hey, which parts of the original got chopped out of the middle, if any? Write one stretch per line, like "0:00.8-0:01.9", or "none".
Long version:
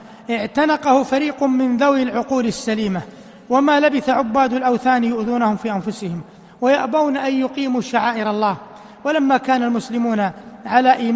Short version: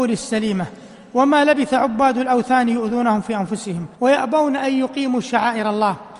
0:06.3-0:06.6